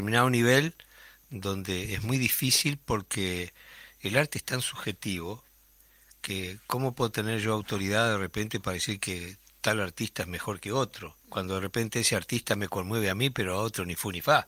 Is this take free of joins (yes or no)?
no